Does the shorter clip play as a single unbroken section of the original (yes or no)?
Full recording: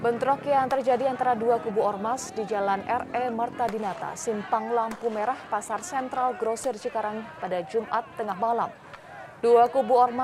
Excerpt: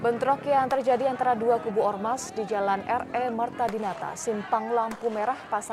yes